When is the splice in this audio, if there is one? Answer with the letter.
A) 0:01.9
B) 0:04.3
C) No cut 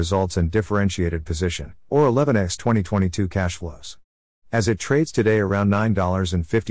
A